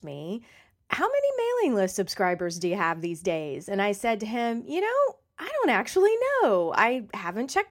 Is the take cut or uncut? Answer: uncut